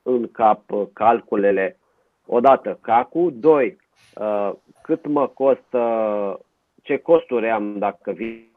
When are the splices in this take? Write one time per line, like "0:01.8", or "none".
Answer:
none